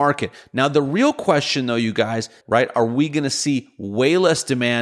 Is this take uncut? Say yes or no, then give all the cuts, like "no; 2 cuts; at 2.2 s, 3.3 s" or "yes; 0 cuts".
no; 1 cut; at 2.4 s